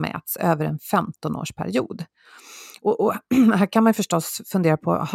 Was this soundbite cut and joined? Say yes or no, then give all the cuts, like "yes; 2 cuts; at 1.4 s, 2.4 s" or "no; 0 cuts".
no; 0 cuts